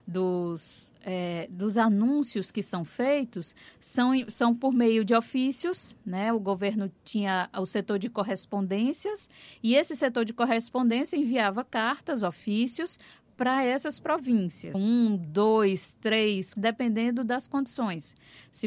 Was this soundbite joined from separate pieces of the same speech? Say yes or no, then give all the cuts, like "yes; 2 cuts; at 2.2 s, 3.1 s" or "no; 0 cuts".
yes; 2 cuts; at 14.7 s, 16.5 s